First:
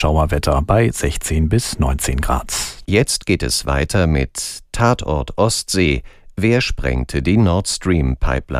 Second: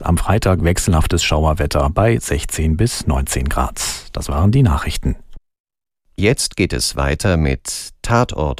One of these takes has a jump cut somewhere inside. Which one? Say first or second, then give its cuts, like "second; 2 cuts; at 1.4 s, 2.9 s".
first; 1 cut; at 2.8 s